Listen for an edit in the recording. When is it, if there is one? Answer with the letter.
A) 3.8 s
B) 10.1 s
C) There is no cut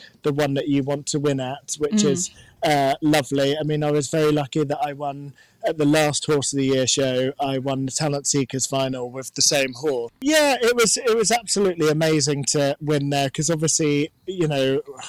B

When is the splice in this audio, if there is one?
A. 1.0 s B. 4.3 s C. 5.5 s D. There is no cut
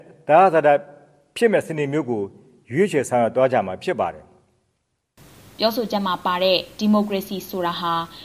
D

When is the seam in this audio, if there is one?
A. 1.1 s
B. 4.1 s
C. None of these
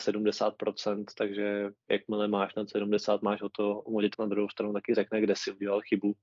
B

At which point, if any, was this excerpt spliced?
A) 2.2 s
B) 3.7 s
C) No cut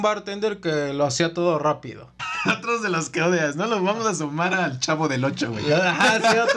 A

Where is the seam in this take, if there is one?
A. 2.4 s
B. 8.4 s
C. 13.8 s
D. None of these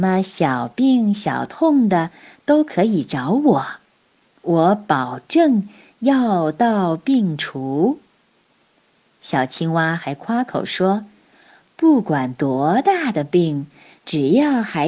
D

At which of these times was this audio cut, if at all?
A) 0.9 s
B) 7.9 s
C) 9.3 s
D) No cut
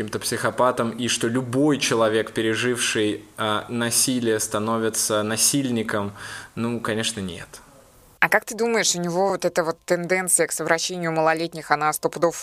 D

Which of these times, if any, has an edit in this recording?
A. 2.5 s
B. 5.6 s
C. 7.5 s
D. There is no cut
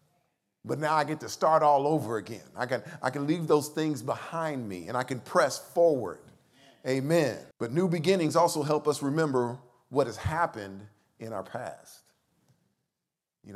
C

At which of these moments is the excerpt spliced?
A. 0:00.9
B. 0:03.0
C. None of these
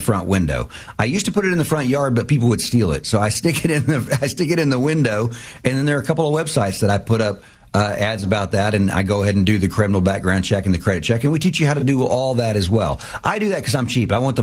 C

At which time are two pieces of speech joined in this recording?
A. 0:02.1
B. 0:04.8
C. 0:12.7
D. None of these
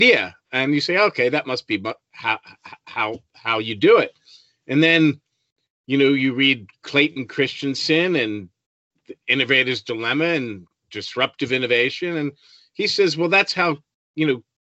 D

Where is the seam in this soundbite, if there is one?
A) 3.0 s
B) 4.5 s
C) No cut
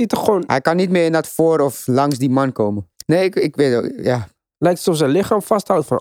A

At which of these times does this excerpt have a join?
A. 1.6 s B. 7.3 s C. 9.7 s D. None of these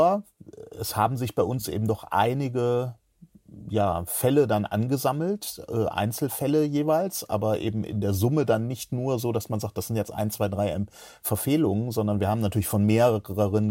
D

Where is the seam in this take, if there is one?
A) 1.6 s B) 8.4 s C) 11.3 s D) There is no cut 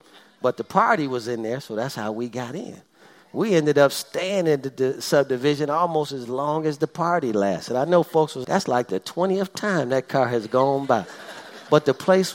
B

